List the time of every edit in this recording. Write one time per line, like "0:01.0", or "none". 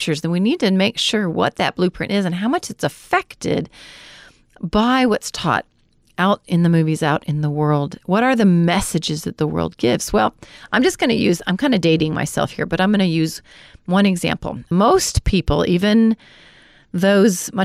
none